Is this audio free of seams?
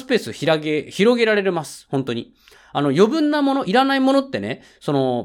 yes; 0 cuts

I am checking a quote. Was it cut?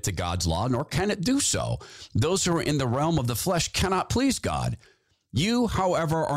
no; 0 cuts

